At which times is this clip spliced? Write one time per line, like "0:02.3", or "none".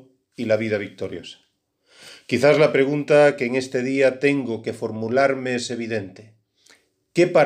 none